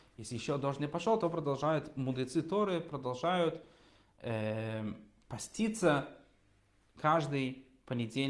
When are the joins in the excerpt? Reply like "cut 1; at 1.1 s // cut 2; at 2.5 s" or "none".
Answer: none